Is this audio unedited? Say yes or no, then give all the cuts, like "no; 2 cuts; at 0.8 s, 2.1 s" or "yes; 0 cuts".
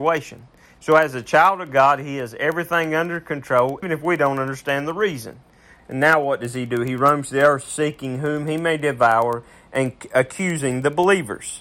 no; 2 cuts; at 3.8 s, 5.8 s